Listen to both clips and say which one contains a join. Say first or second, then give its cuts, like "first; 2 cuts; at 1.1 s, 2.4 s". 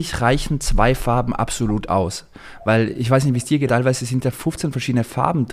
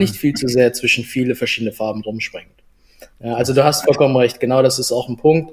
first; 1 cut; at 3.7 s